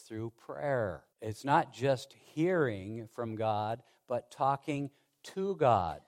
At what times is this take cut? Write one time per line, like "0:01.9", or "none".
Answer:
0:01.1